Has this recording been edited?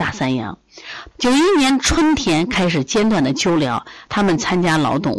yes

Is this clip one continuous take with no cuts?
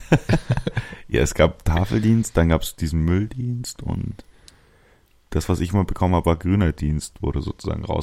yes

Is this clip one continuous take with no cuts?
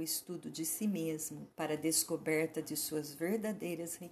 no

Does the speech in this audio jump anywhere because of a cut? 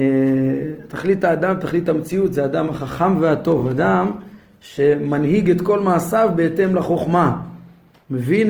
no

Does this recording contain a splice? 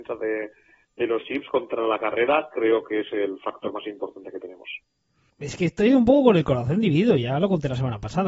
yes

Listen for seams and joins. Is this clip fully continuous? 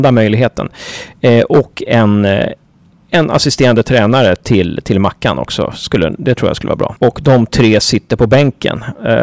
no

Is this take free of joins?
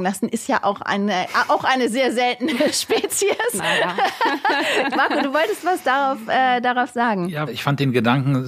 no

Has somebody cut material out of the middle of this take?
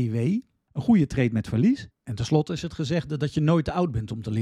yes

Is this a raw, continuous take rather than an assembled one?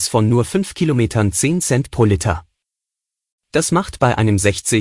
yes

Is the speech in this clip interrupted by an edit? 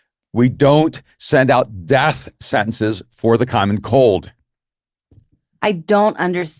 no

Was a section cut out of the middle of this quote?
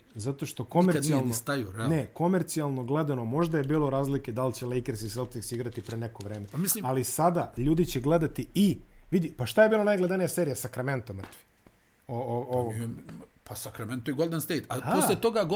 no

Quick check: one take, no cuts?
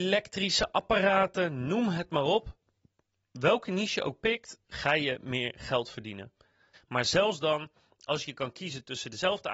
no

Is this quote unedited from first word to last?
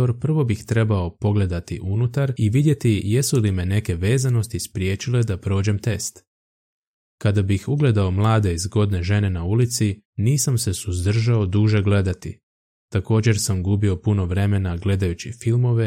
no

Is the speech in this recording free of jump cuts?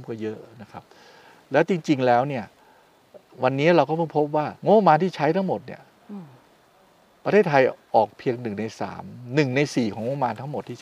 no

